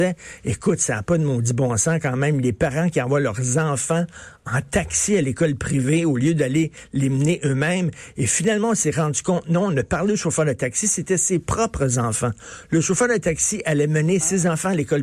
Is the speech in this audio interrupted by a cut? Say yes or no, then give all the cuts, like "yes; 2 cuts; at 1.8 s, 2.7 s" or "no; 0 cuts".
no; 0 cuts